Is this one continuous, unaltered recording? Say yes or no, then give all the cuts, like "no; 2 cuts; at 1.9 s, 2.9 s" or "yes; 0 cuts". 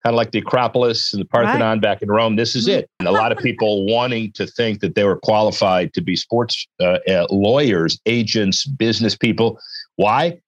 no; 1 cut; at 3.0 s